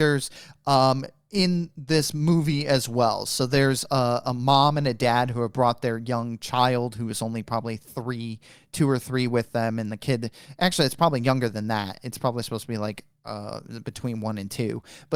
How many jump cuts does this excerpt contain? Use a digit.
0